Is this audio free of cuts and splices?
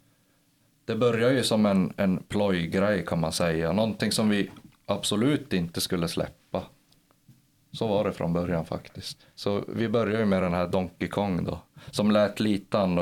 yes; 0 cuts

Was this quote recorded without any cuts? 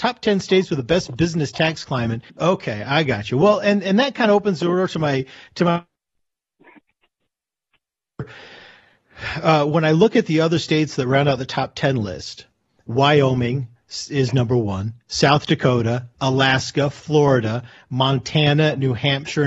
no; 1 cut; at 2.3 s

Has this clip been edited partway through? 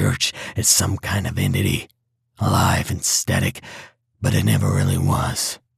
no; 0 cuts

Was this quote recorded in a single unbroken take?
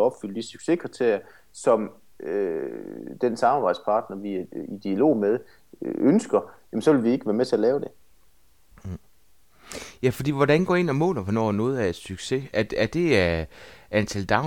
yes; 0 cuts

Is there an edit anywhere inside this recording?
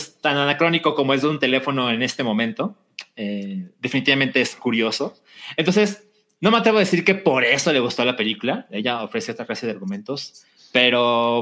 no; 0 cuts

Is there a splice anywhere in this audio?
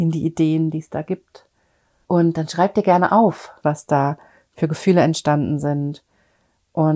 yes; 2 cuts; at 2.0 s, 3.6 s

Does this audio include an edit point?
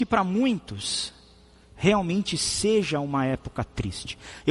no; 0 cuts

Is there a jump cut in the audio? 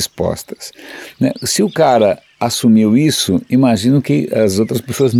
no; 0 cuts

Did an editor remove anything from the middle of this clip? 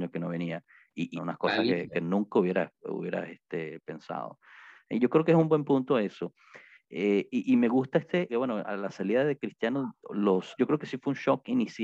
yes; 3 cuts; at 1.2 s, 8.3 s, 10.6 s

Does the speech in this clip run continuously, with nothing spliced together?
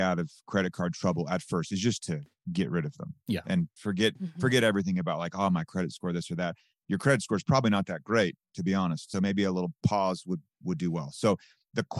yes; 0 cuts

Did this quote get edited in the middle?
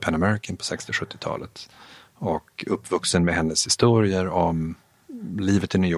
no; 0 cuts

